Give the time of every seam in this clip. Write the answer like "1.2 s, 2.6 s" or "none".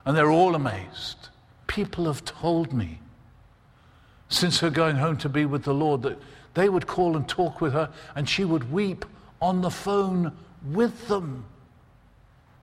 1.6 s